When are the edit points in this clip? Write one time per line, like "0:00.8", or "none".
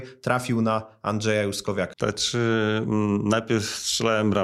0:01.9